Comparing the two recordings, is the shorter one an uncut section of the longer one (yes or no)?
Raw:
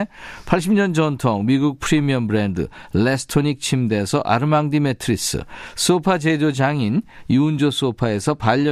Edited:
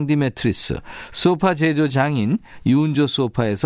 yes